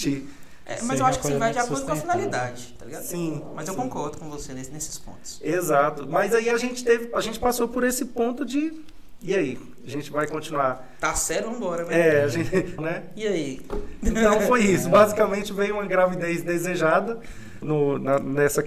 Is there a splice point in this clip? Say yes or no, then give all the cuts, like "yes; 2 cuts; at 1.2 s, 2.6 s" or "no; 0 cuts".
yes; 2 cuts; at 12.8 s, 17.6 s